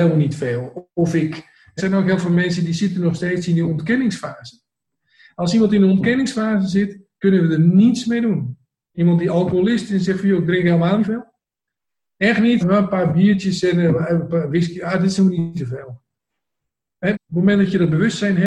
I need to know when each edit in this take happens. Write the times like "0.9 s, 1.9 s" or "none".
1.8 s, 12.6 s, 17.1 s